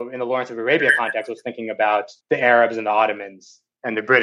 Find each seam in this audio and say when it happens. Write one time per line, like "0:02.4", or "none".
0:02.2

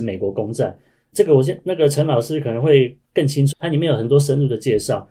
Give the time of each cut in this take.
0:01.1
0:03.5

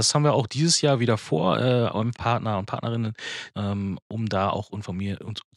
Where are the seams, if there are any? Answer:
0:02.1
0:03.5

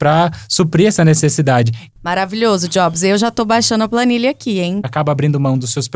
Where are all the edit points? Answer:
0:01.9
0:04.8

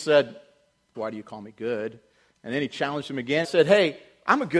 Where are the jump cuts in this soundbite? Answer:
0:00.9
0:03.4

